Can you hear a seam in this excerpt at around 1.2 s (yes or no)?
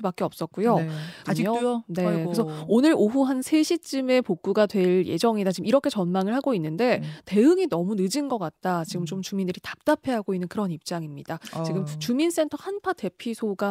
yes